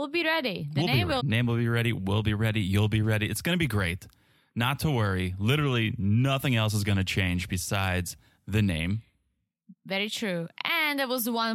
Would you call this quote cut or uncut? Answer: cut